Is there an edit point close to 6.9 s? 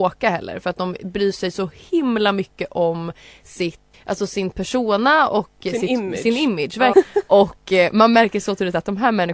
yes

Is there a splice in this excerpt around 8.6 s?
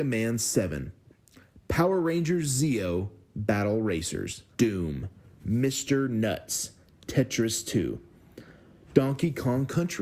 no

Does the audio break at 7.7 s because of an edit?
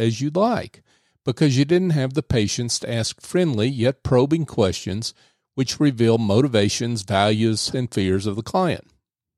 yes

